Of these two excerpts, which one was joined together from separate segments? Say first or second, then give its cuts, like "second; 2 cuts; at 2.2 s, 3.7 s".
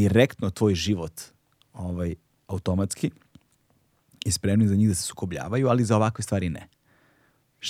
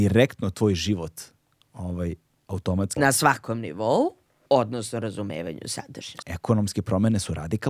second; 3 cuts; at 3.0 s, 4.5 s, 6.2 s